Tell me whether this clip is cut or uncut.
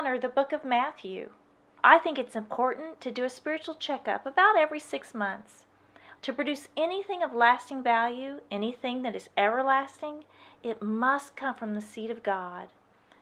cut